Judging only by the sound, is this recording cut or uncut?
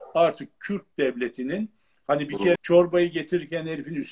cut